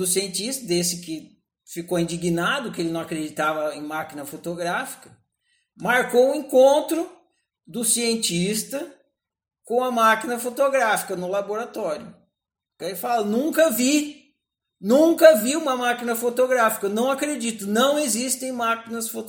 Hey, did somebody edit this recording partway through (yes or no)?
yes